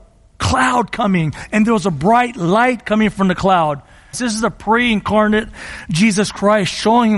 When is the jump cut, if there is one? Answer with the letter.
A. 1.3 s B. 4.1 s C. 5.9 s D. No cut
B